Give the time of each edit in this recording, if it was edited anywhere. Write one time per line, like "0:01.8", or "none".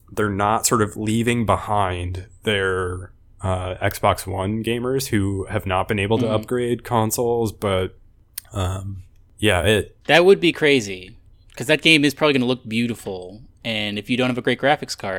0:10.0

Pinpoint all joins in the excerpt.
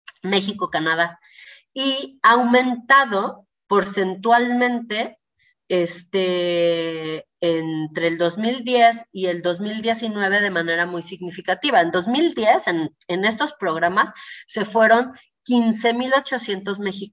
none

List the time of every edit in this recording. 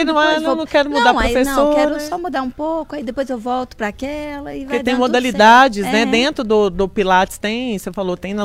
none

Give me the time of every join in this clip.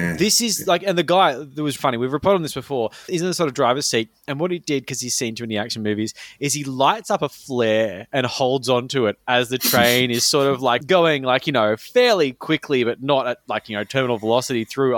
0:01.8
0:03.1

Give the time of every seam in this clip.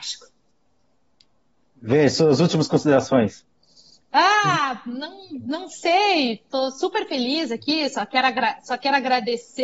none

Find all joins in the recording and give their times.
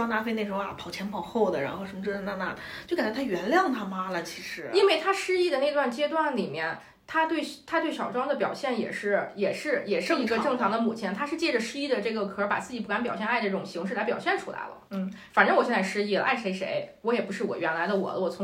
0:14.9

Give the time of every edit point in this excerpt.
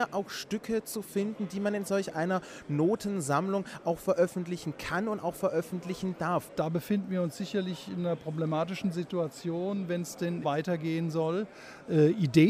0:06.5
0:10.4

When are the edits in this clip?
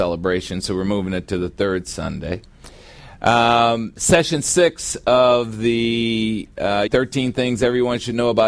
0:06.9

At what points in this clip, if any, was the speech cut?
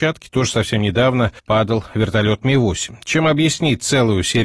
0:01.4

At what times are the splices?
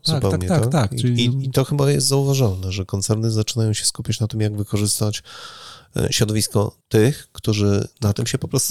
0:06.8

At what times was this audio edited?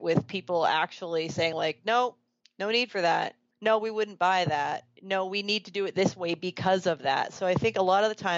none

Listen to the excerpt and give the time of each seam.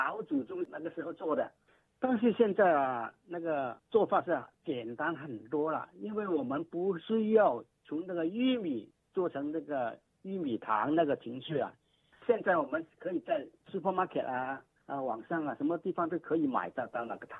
none

